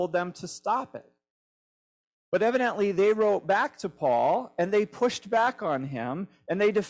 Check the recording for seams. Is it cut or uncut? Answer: uncut